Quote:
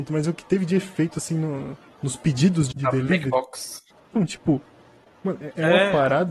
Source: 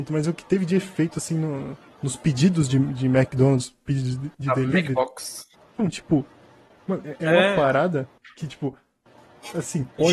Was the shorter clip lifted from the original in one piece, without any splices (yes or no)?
no